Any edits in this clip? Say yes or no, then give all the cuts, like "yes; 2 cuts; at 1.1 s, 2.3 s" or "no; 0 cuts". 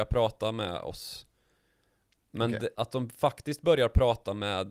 yes; 1 cut; at 2.7 s